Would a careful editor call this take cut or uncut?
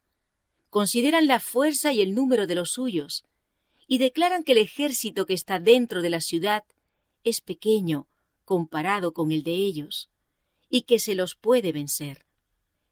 uncut